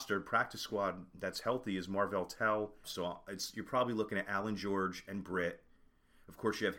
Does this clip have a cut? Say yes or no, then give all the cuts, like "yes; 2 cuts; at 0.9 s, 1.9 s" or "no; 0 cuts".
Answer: yes; 1 cut; at 2.8 s